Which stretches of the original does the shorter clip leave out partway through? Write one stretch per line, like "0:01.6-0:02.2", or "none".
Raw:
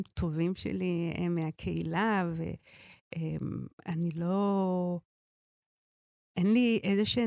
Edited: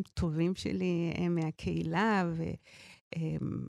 none